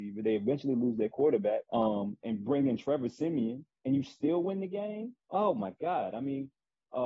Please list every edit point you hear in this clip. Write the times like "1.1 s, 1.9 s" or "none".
1.6 s

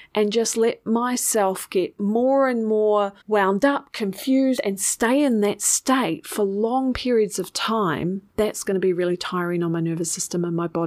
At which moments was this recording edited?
4.6 s, 8.3 s

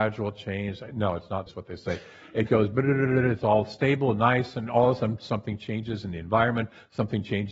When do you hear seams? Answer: 1.5 s

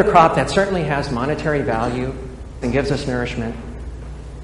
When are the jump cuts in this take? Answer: 2.6 s

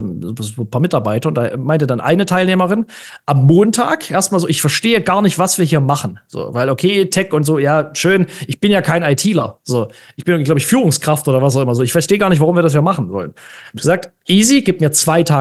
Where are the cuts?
none

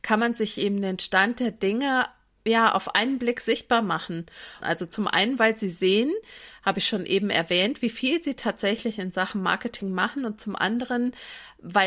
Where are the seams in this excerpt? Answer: 4.6 s

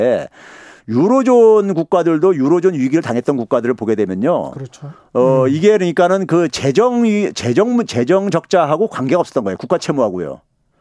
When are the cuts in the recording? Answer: none

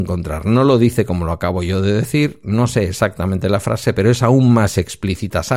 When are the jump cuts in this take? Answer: none

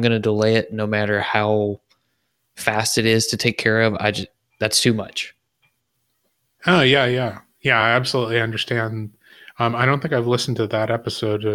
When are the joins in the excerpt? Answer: none

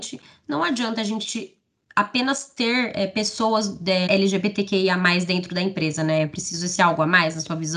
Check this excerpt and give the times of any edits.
4.1 s

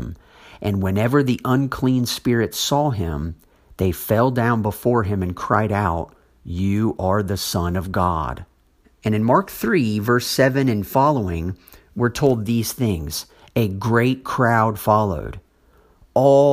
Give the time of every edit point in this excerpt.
8.8 s

